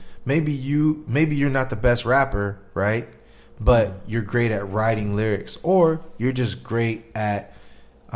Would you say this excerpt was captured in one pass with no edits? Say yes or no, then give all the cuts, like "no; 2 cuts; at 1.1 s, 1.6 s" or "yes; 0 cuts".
yes; 0 cuts